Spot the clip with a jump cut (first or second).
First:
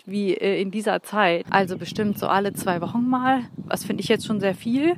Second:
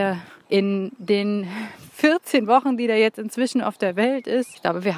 first